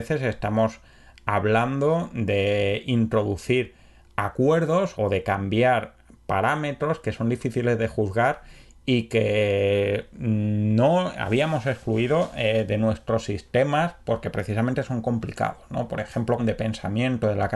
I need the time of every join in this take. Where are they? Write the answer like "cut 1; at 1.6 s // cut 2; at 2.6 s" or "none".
cut 1; at 4.9 s // cut 2; at 16.4 s